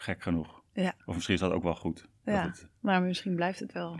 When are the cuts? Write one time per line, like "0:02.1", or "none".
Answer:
none